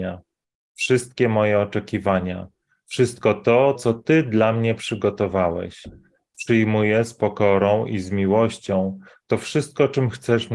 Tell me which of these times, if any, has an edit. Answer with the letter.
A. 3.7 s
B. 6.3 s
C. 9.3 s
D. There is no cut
A